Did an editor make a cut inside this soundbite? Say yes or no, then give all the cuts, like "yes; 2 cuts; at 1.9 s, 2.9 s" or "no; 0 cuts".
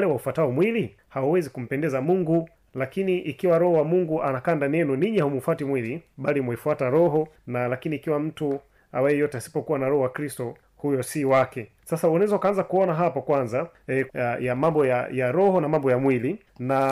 yes; 1 cut; at 14.1 s